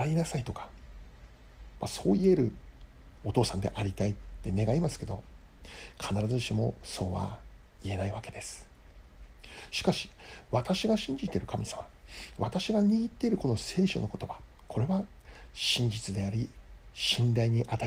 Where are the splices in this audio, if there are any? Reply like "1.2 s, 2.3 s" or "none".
9.7 s